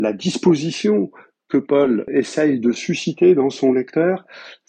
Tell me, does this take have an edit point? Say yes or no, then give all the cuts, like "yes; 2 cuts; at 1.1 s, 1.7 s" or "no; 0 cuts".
yes; 1 cut; at 2.1 s